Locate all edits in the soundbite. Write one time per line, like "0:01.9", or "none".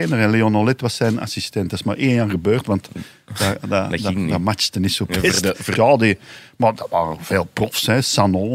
0:05.8
0:06.8